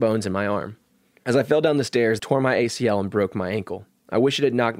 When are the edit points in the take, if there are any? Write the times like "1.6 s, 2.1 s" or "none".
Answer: 2.2 s